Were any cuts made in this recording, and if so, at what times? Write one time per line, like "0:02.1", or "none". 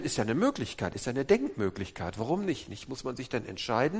none